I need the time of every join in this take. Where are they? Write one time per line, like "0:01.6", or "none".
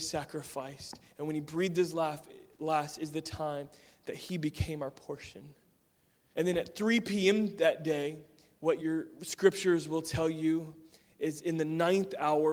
0:06.3
0:08.8